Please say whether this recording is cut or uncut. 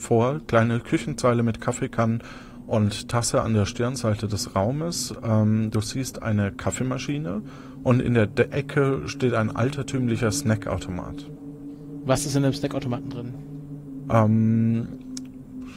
uncut